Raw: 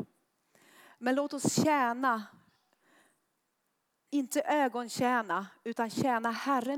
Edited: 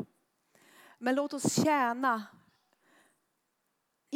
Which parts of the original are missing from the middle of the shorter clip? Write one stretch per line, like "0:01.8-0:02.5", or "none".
none

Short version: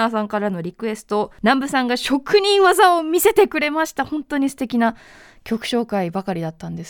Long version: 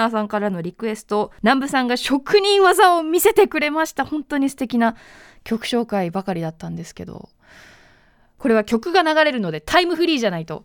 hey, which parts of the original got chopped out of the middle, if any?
none

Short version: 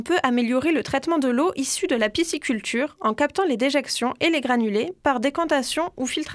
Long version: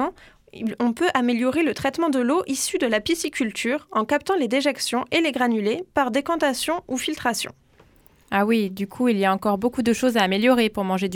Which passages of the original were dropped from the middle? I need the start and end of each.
none

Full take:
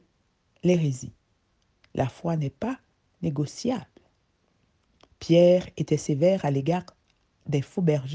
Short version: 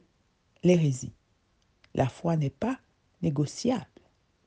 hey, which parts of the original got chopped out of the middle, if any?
none

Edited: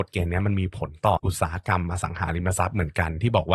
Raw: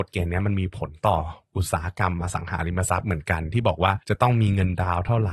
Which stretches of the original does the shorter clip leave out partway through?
0:01.2-0:01.5

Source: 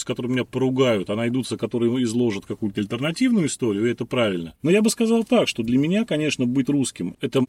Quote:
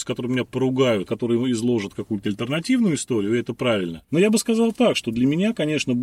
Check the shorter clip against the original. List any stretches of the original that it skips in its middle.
0:01.1-0:01.6

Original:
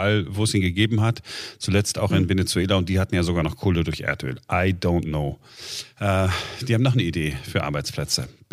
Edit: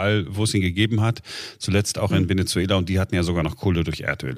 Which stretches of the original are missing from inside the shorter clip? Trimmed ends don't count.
none

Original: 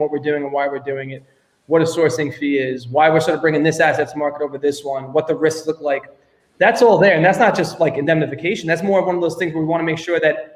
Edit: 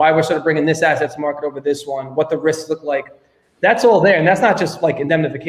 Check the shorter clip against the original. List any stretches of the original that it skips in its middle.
none

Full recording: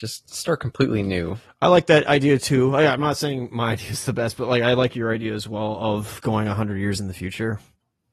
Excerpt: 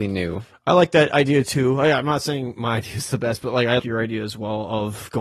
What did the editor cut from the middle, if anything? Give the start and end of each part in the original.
0:04.7-0:04.9

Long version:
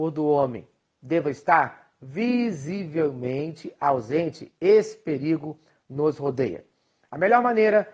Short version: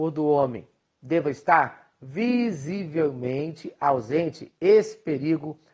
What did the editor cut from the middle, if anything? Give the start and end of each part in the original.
none

